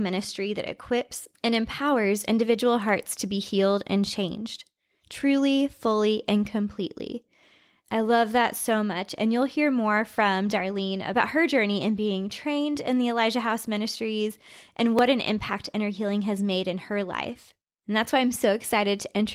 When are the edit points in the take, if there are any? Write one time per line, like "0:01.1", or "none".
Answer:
0:17.8